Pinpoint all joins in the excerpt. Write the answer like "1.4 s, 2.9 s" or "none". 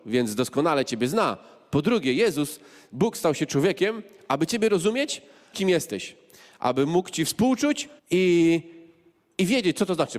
5.5 s, 8.0 s